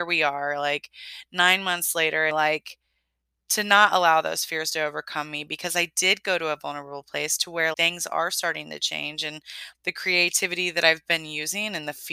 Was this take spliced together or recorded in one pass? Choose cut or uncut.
cut